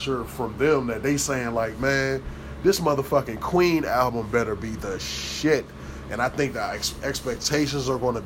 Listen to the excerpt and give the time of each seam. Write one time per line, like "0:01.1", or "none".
none

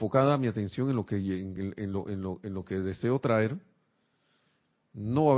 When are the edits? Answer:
none

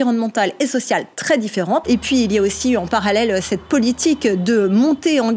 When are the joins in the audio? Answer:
0:01.8

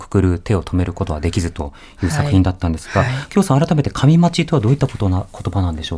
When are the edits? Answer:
none

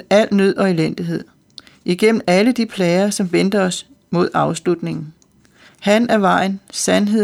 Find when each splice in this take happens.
0:05.7

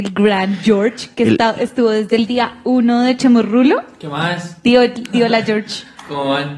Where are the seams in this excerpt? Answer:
none

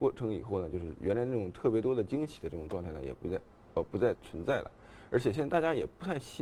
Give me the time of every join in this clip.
0:04.1

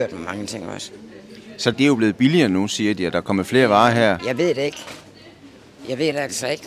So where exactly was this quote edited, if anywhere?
0:01.7
0:04.2

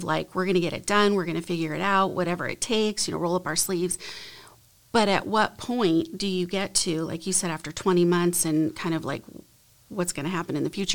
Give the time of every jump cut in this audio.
none

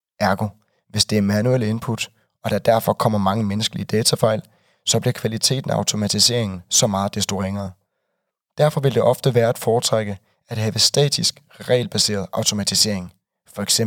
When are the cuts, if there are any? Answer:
none

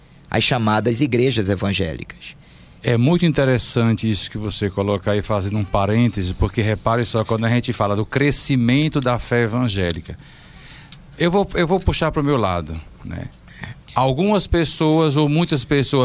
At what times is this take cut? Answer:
0:02.8

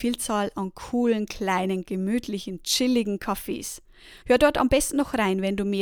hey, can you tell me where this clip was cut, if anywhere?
0:04.2

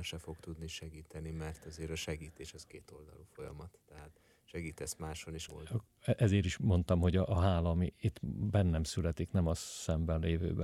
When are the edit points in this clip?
0:05.5

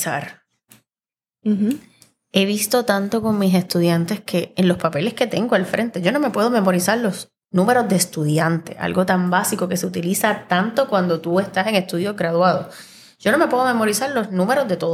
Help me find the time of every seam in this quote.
none

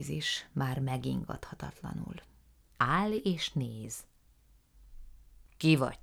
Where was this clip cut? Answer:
0:02.6

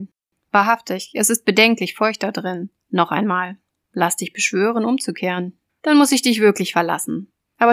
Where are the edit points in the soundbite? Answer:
0:02.8
0:05.7

